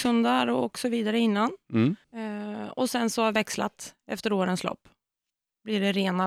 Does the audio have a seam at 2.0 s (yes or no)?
yes